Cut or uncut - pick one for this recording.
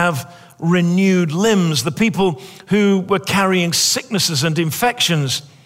uncut